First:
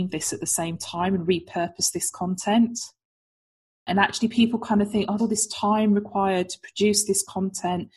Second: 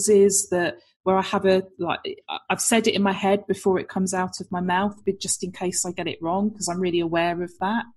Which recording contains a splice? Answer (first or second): first